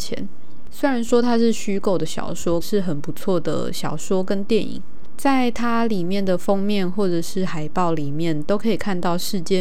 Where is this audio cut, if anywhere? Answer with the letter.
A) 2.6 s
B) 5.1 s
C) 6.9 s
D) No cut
A